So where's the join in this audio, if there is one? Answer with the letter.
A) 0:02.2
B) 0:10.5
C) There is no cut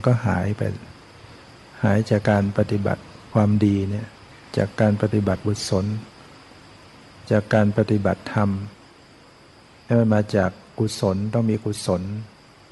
A